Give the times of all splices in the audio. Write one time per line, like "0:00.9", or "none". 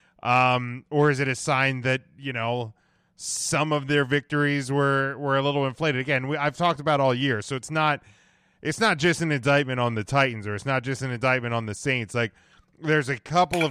none